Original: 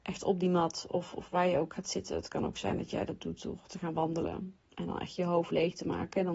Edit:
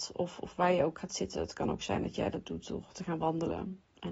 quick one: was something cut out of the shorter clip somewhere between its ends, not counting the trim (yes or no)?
no